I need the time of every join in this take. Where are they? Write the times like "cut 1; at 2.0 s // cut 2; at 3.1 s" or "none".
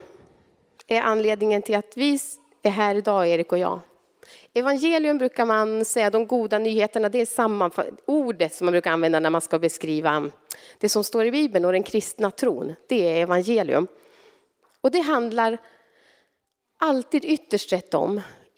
none